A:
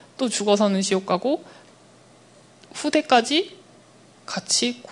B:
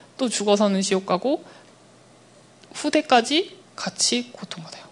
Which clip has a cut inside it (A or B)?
B